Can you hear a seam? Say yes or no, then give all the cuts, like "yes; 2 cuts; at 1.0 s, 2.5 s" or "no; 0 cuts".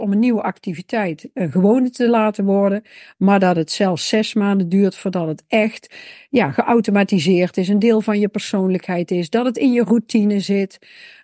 no; 0 cuts